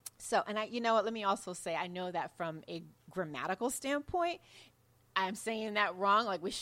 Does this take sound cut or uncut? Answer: uncut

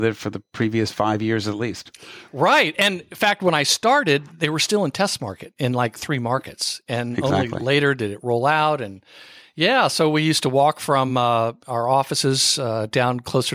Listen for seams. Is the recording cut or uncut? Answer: uncut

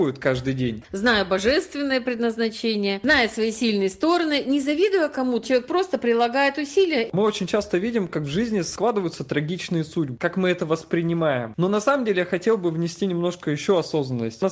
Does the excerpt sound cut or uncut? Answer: cut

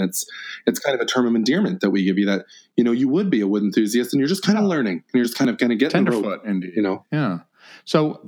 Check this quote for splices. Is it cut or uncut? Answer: uncut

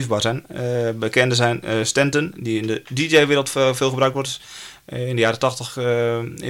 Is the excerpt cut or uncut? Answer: uncut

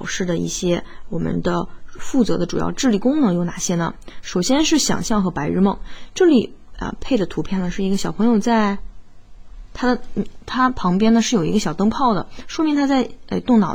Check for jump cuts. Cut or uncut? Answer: uncut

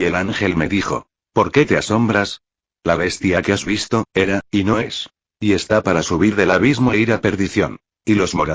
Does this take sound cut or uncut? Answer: cut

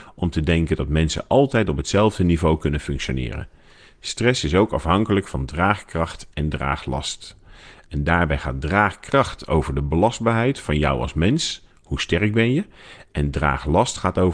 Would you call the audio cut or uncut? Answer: uncut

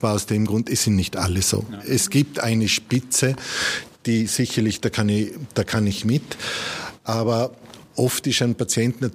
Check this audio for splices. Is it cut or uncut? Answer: uncut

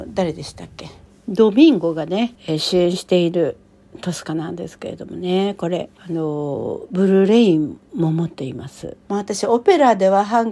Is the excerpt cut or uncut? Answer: cut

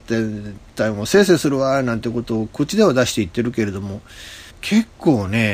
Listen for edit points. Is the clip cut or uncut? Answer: cut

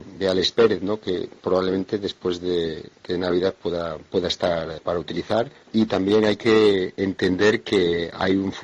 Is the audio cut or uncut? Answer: uncut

